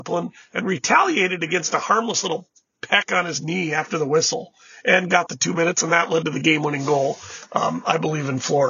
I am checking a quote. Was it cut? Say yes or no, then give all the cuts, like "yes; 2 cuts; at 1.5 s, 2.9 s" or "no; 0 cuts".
no; 0 cuts